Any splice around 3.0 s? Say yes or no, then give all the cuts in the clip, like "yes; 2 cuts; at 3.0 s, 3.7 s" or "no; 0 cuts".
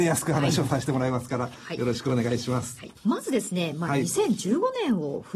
yes; 1 cut; at 3.0 s